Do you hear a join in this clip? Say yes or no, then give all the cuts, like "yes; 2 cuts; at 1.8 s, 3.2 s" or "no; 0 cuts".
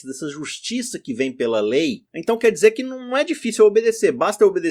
no; 0 cuts